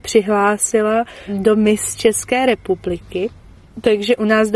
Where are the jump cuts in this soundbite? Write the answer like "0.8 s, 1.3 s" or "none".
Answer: none